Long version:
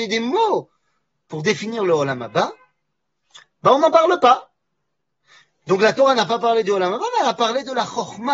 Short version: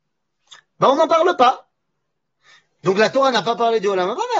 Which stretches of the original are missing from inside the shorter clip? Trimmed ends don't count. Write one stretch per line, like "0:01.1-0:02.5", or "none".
none